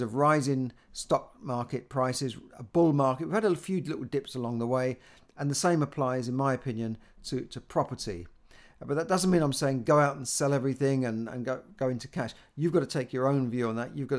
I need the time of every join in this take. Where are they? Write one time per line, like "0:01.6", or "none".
none